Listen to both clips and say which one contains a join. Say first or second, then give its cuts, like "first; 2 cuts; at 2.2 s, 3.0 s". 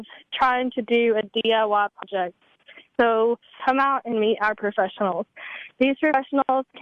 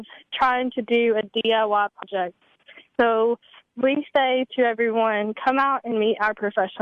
first; 1 cut; at 3.6 s